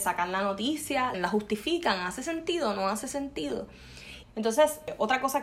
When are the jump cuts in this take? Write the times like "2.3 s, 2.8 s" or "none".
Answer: 1.1 s, 4.2 s